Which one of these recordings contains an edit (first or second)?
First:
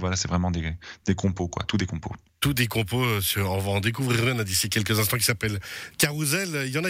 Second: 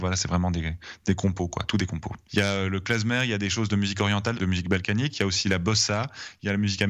second